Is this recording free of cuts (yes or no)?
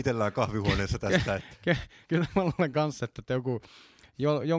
no